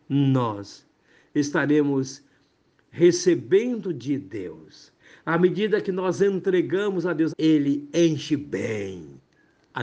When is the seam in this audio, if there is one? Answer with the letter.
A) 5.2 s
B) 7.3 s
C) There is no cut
B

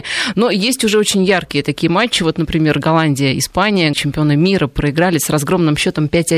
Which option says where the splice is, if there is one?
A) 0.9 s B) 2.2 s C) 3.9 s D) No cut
C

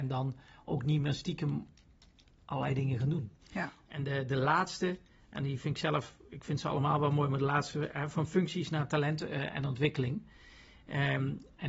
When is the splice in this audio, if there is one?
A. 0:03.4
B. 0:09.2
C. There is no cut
A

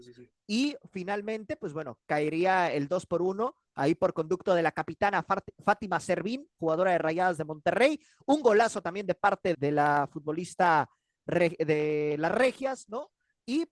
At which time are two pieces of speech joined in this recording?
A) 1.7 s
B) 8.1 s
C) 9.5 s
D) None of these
C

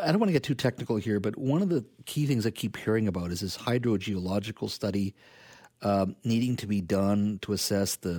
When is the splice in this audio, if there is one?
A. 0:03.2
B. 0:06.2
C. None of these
C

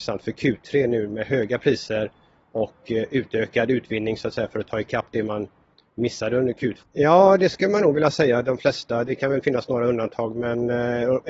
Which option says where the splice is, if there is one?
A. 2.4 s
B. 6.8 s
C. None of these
B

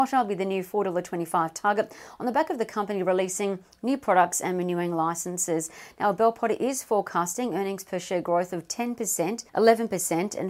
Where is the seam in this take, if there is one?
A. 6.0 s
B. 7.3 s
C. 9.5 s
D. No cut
C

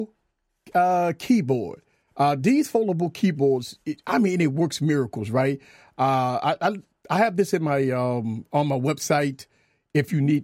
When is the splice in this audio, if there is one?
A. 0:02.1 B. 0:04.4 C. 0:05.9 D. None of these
A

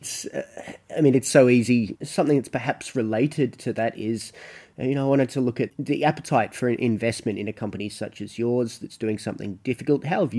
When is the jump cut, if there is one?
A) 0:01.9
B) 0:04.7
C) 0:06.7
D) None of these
A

